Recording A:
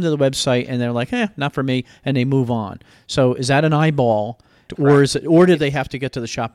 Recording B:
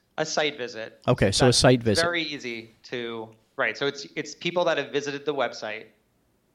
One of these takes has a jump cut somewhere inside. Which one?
A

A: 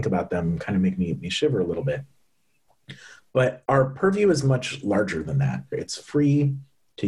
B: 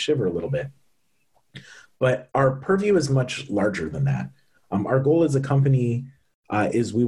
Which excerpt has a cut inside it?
A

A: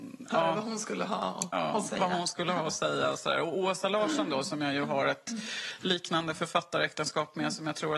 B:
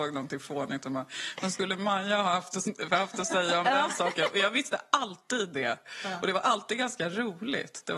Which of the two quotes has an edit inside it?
B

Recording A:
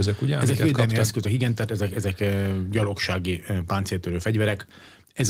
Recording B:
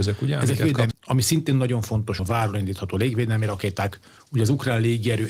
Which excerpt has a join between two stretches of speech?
B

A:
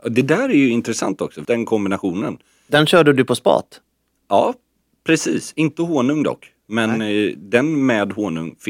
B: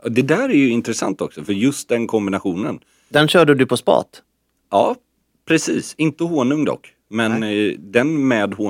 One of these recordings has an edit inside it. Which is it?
A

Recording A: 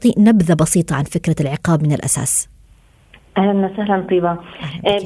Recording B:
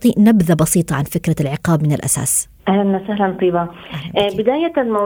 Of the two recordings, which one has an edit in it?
B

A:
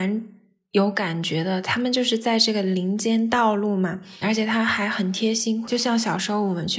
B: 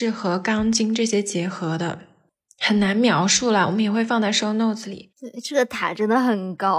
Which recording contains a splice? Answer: A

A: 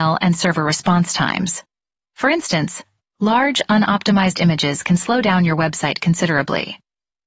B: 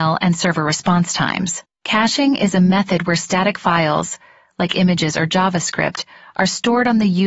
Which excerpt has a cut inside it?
B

